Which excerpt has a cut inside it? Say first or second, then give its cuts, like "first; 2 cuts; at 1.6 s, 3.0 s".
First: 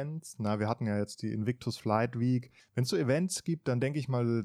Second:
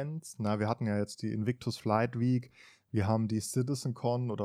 first; 1 cut; at 2.6 s